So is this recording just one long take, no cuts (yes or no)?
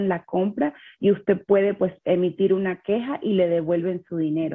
yes